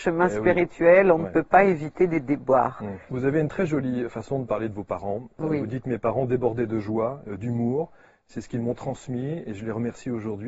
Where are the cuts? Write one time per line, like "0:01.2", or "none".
0:03.1